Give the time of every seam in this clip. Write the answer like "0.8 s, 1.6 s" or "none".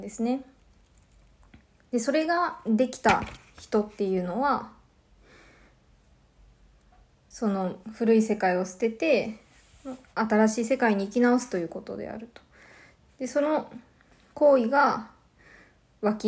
7.8 s